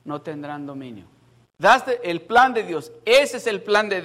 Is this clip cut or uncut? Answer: cut